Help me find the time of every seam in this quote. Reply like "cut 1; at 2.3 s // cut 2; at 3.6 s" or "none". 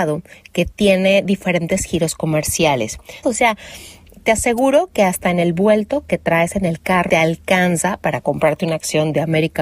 cut 1; at 3.2 s // cut 2; at 7.1 s